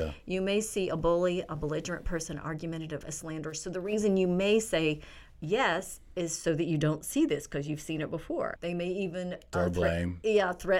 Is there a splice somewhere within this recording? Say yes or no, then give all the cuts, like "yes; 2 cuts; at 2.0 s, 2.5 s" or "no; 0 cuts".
yes; 2 cuts; at 3.0 s, 8.6 s